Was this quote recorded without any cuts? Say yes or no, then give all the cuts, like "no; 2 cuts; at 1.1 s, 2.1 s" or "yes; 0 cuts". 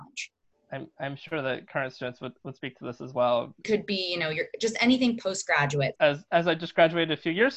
no; 2 cuts; at 3.6 s, 6.0 s